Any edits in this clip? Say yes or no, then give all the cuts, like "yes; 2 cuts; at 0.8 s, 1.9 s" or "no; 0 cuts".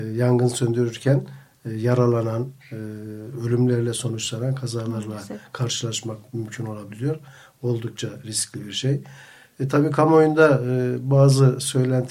no; 0 cuts